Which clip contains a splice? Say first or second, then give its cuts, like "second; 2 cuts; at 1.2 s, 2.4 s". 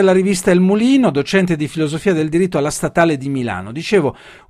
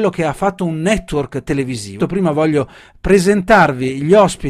second; 1 cut; at 2.0 s